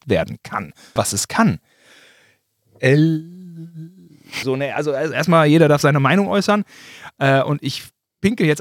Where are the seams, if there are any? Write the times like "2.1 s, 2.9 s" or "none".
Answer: 1.0 s, 4.4 s